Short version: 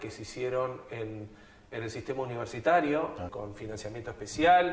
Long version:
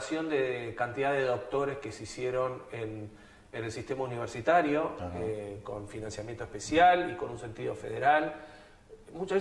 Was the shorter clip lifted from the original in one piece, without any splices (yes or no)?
no